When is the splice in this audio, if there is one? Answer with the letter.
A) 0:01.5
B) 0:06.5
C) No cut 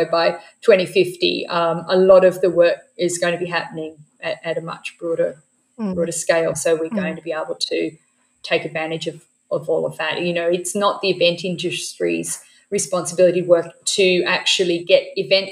B